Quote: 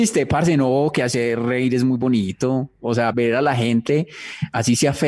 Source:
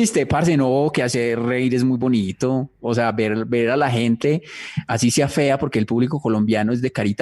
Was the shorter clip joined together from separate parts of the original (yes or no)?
yes